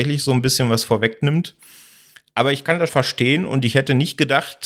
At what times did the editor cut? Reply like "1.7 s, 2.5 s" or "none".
2.9 s